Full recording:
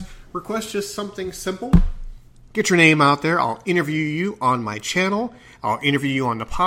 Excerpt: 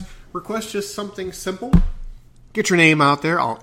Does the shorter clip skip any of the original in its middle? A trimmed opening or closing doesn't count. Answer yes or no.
no